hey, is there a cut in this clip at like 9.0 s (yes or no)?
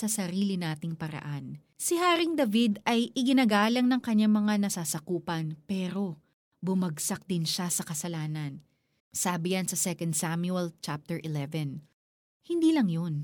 yes